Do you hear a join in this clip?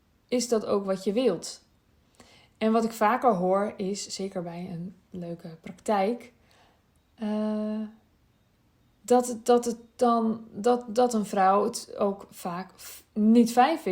no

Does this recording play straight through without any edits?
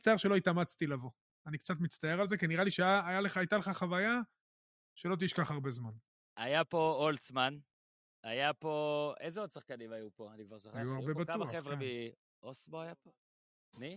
yes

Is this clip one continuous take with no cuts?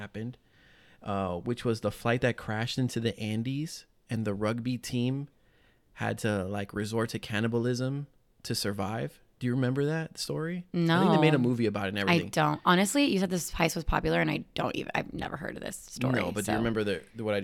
yes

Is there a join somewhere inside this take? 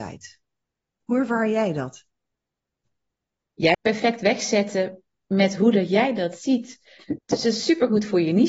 yes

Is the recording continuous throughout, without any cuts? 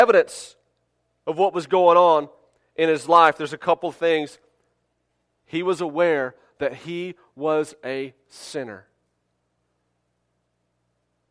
yes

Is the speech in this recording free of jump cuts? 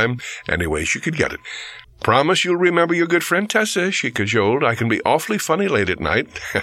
no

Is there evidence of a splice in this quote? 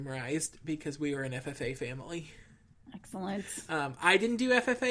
no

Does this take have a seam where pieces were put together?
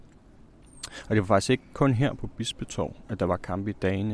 no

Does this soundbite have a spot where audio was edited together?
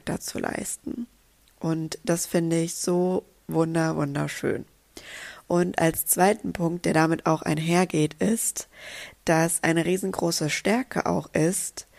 no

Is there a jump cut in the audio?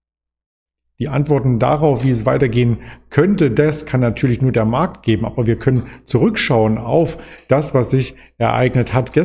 no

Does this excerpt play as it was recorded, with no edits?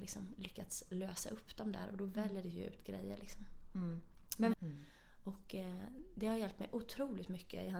no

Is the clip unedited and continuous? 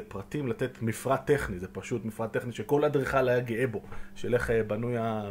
yes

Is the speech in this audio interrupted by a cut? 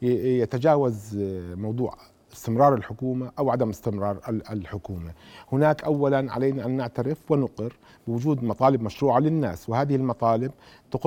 no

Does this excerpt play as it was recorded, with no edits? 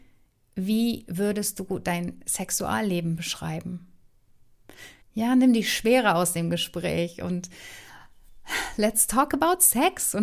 no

